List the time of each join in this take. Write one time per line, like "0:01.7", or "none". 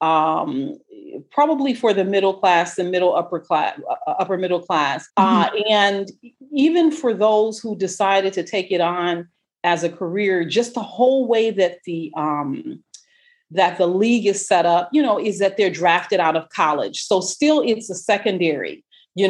0:05.1